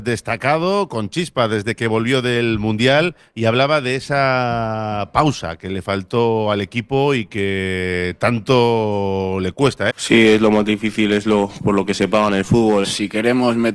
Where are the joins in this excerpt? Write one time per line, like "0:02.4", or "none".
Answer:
0:09.9
0:12.8